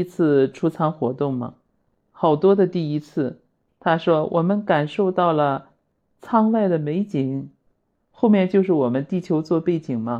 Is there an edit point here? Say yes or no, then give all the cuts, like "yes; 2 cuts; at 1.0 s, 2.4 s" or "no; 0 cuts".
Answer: no; 0 cuts